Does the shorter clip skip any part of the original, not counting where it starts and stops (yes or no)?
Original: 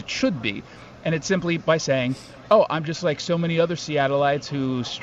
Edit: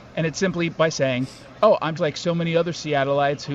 yes